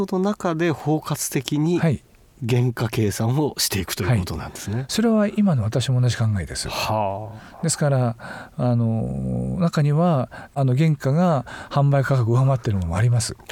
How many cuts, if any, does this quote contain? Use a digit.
0